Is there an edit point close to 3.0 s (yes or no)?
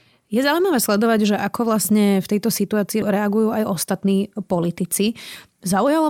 yes